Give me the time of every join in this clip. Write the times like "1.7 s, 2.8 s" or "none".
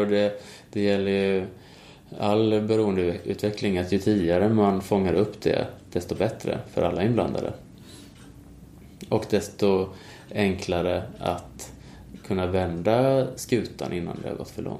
none